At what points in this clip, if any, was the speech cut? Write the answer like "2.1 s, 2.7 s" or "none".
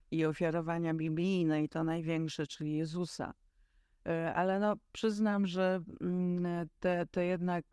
none